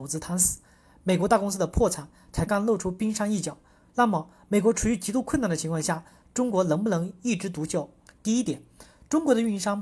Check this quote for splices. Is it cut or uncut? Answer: cut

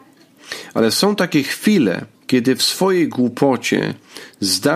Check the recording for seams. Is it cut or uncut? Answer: cut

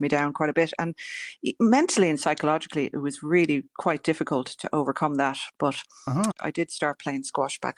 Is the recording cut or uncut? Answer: cut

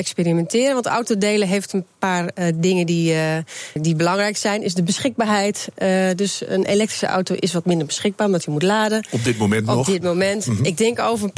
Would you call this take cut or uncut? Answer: cut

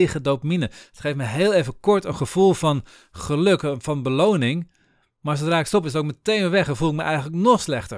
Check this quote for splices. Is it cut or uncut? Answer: uncut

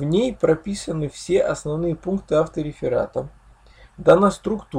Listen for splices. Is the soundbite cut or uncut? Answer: uncut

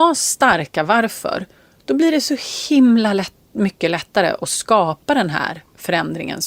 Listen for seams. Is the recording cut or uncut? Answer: uncut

